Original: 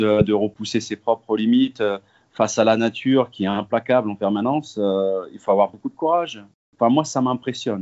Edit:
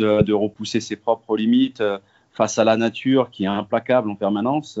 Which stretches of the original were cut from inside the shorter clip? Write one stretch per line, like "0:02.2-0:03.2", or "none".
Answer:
none